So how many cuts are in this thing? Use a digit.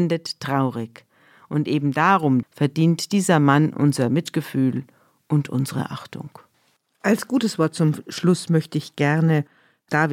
1